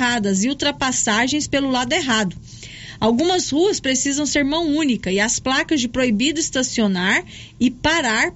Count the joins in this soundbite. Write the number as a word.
zero